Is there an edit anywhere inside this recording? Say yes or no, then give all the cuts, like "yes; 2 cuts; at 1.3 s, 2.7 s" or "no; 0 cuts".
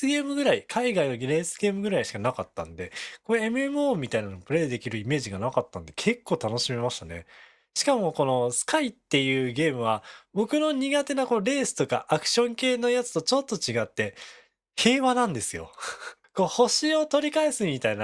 no; 0 cuts